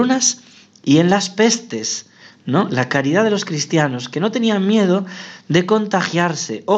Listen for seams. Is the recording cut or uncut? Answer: uncut